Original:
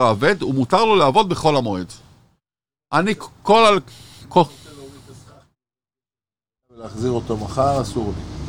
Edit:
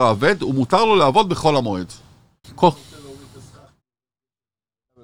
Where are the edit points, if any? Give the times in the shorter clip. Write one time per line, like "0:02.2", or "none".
0:02.4